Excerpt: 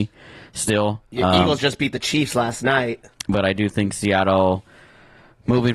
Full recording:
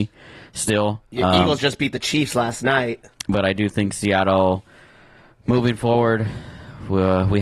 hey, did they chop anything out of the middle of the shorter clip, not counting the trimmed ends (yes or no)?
no